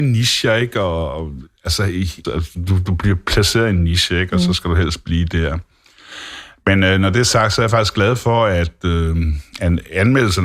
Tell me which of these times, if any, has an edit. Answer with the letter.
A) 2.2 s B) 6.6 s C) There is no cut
A